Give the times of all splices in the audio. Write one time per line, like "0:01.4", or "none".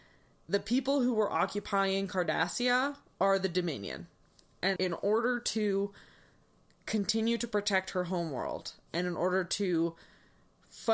0:04.8